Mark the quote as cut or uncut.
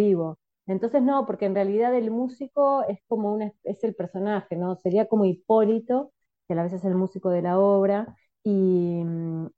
uncut